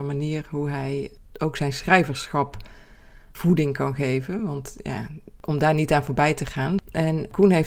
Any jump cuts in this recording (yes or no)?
no